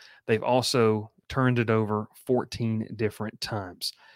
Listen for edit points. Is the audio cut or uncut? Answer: uncut